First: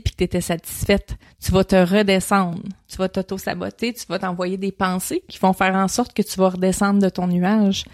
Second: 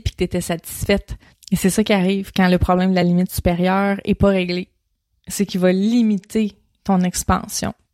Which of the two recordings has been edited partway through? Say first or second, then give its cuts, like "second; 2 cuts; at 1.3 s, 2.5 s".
second; 1 cut; at 1.3 s